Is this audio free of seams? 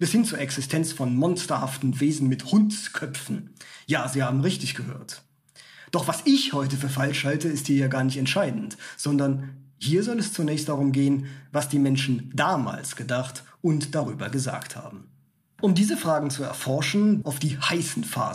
no; 2 cuts; at 15.5 s, 17.2 s

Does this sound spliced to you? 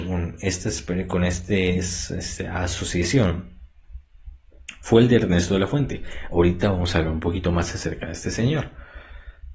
no; 0 cuts

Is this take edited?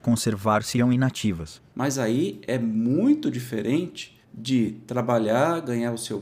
yes; 2 cuts; at 1.7 s, 4.2 s

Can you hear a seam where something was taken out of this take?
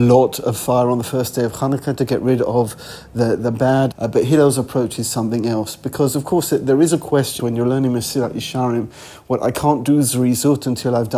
yes; 2 cuts; at 3.9 s, 7.4 s

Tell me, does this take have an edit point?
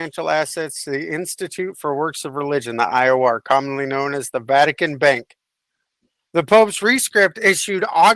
no; 0 cuts

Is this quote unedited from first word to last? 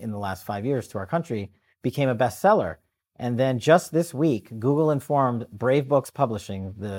yes; 0 cuts

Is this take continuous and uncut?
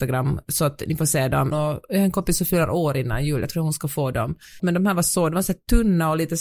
no; 2 cuts; at 1.5 s, 4.6 s

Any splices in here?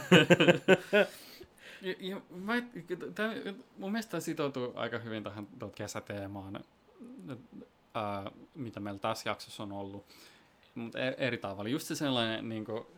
yes; 1 cut; at 5.7 s

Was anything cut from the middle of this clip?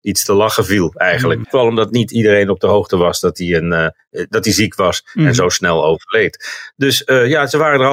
yes; 1 cut; at 1.4 s

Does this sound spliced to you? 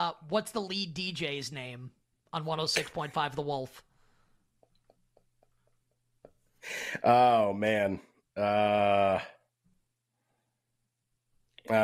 no; 0 cuts

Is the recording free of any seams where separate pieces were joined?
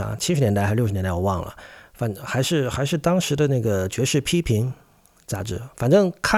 yes; 0 cuts

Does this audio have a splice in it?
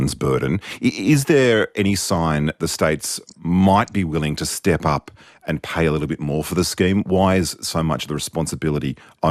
no; 0 cuts

